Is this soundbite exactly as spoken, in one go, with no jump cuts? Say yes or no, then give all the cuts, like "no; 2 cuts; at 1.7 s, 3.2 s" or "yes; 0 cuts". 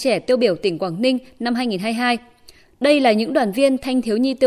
yes; 0 cuts